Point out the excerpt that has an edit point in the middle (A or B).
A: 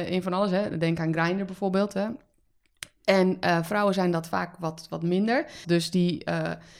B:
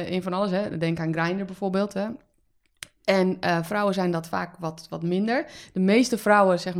A